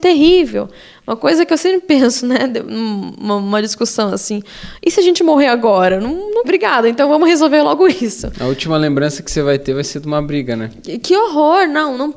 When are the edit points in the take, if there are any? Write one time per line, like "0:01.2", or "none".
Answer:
0:06.4